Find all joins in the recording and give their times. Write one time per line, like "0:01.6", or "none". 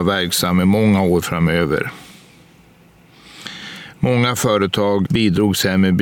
0:05.1